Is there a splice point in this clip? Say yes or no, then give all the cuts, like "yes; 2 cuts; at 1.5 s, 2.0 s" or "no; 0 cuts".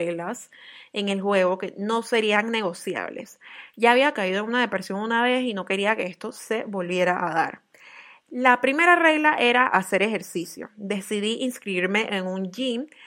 no; 0 cuts